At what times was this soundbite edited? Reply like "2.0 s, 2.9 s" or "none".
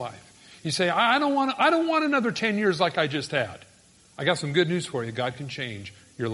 none